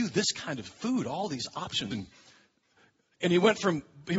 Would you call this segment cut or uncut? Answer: cut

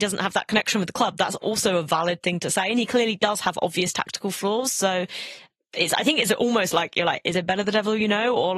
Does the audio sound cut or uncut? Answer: uncut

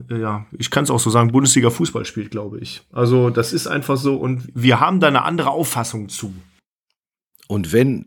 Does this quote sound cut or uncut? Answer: uncut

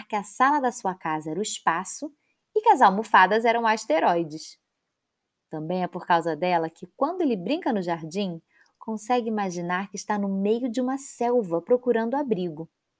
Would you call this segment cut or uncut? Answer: uncut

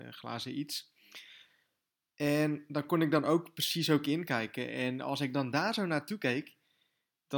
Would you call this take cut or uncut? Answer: uncut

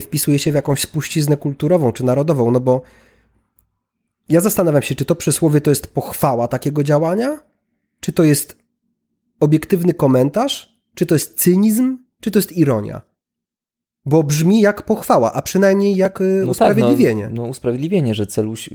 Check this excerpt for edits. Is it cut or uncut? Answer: uncut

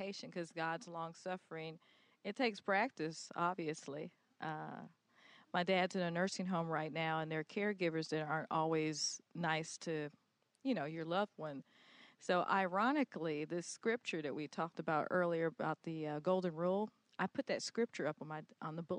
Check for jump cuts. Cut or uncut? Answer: uncut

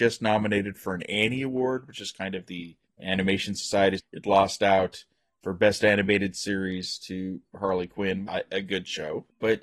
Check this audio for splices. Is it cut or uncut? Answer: cut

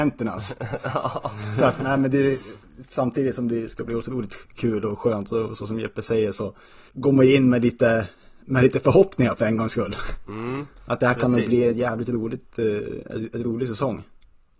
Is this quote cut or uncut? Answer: cut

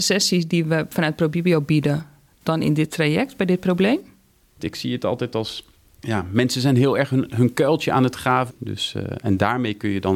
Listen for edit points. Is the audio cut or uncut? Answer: cut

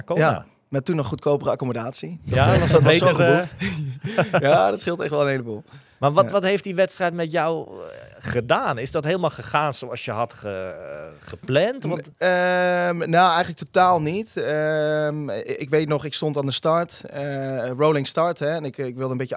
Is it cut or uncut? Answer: uncut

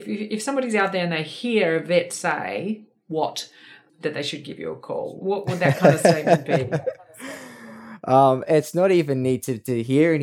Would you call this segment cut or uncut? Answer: uncut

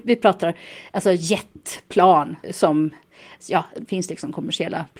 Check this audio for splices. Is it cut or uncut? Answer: cut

